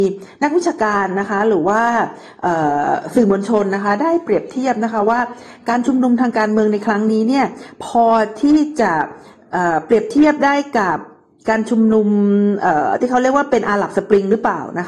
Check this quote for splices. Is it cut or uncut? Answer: uncut